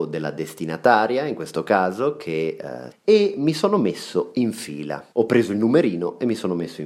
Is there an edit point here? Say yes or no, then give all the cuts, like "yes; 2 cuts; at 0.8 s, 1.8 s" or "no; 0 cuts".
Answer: yes; 2 cuts; at 2.9 s, 5.1 s